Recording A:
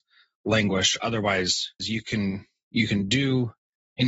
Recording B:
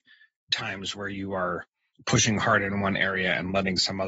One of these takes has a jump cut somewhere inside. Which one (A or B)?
A